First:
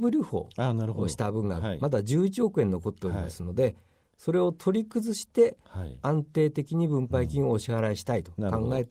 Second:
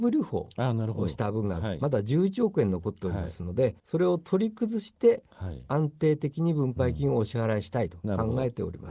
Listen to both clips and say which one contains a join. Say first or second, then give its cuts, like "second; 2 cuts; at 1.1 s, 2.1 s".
second; 1 cut; at 3.8 s